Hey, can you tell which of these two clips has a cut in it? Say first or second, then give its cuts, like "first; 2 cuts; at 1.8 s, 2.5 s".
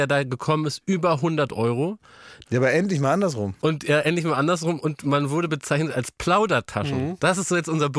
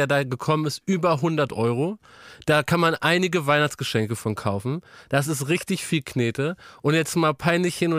first; 1 cut; at 2.4 s